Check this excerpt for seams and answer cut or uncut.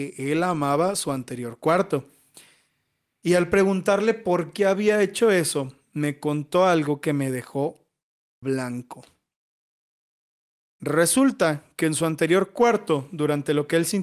uncut